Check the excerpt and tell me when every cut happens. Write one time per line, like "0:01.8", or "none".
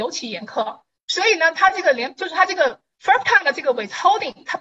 none